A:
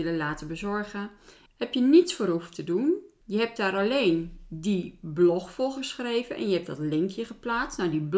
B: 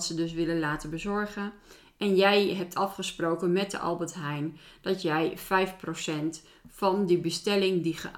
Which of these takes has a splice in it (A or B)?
A